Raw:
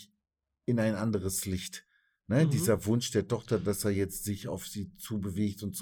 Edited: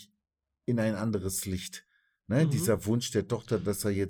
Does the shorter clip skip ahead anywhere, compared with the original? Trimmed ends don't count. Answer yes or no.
no